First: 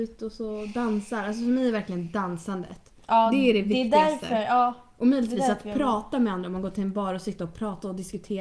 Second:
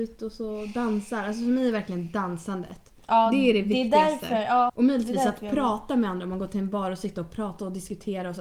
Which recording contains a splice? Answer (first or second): second